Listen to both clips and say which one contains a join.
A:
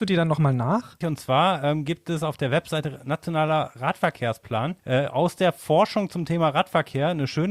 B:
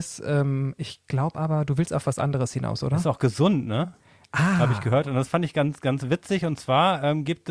A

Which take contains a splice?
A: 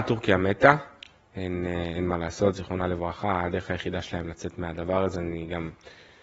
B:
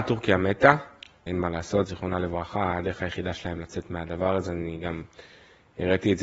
B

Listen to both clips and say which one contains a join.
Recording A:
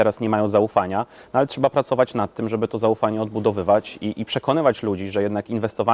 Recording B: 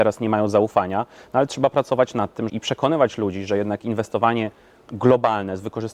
B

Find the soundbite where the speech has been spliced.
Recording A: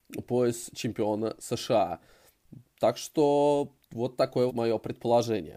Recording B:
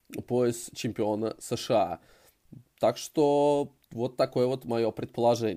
A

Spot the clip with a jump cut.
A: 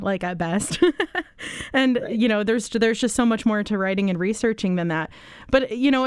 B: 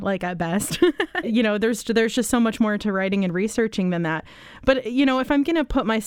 B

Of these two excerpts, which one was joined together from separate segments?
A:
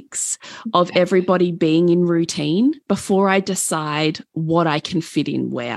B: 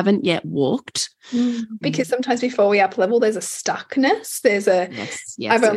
B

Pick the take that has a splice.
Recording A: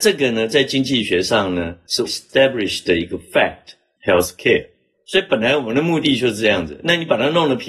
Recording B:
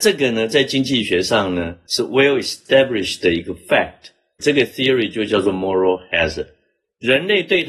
A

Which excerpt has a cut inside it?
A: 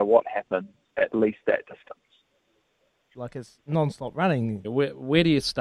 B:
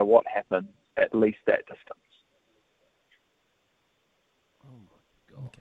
A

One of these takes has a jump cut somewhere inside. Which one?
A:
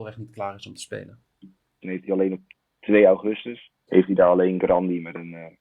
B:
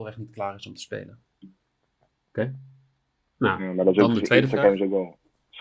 A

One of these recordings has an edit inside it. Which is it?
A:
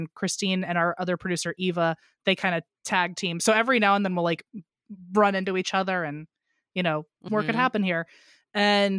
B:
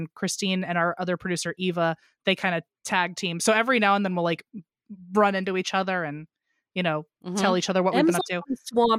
A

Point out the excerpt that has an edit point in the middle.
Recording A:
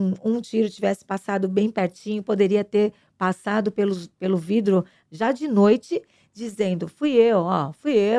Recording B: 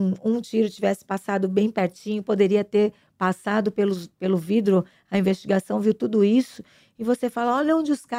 A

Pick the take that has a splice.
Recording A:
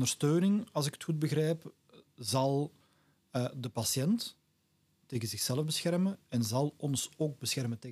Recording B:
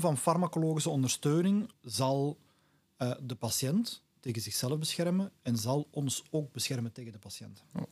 B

